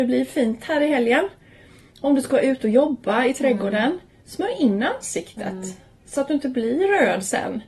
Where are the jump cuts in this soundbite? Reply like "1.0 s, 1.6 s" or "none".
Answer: none